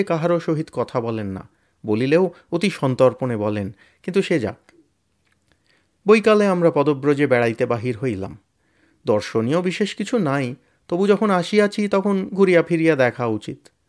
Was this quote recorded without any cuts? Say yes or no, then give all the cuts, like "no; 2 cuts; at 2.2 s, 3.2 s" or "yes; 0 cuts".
yes; 0 cuts